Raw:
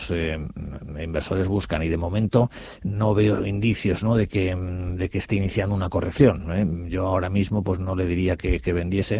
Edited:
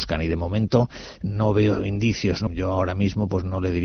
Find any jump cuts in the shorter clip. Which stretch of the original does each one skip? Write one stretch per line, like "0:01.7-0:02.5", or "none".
0:04.1-0:06.8